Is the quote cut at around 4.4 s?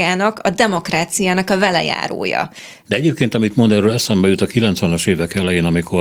no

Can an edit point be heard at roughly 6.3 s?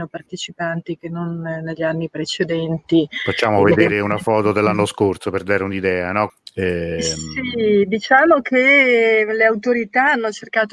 yes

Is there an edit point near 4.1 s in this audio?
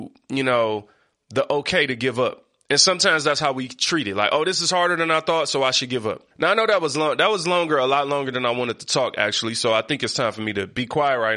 no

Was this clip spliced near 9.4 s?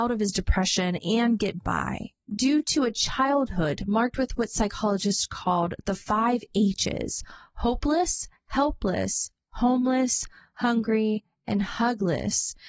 no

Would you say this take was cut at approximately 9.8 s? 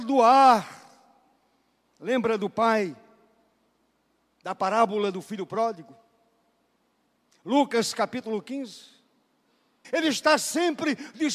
yes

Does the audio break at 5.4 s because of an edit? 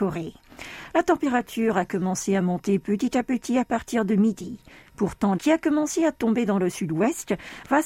yes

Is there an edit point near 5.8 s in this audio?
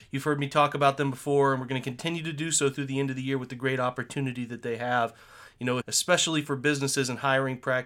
yes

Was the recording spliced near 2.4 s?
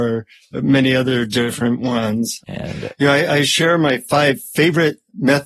yes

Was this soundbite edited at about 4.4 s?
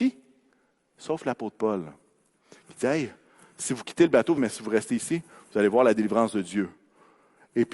yes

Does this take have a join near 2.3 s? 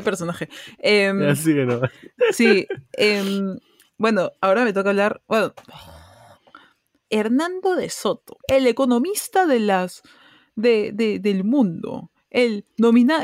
no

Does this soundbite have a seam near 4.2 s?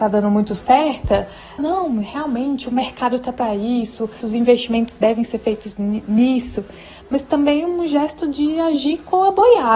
yes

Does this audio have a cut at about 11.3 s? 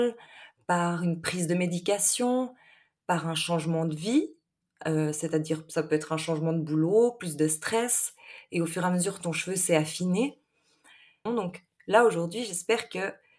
yes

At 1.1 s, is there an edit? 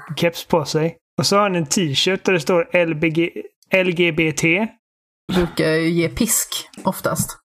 yes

